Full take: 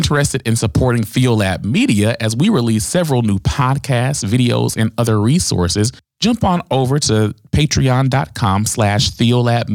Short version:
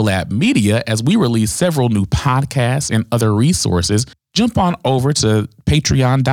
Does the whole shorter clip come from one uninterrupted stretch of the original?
no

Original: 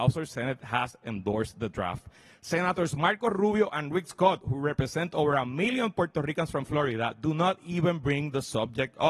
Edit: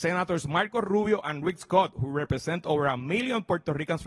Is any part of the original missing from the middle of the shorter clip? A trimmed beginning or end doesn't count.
no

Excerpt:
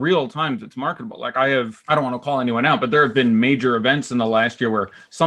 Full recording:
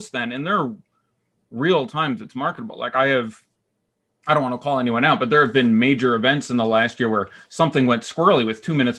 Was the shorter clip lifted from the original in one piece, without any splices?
no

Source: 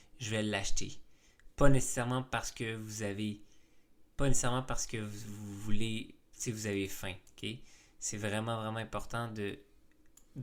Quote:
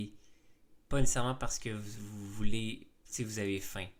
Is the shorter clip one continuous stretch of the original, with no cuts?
yes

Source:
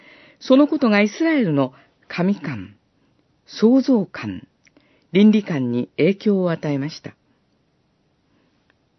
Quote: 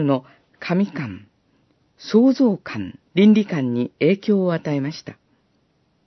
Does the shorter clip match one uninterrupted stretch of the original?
no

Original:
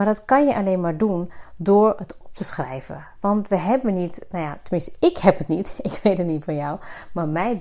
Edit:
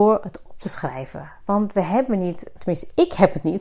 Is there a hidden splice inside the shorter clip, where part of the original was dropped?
yes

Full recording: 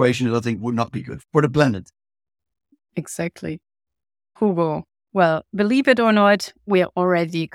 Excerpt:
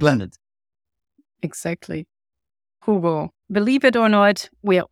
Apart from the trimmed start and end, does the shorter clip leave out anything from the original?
yes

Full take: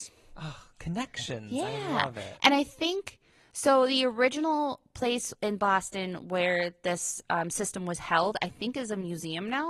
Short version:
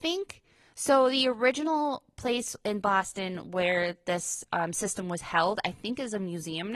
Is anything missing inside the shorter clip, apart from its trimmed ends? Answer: no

